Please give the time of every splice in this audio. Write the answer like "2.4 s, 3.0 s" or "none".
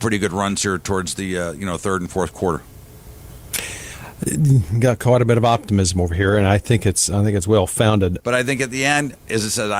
8.2 s